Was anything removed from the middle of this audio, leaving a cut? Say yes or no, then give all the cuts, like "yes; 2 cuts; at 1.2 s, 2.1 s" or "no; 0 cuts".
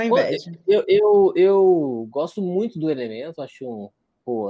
no; 0 cuts